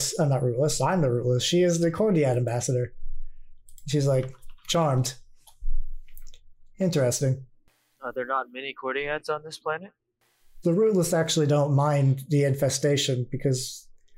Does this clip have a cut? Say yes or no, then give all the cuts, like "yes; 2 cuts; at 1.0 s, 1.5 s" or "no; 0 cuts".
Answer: yes; 2 cuts; at 6.7 s, 10.6 s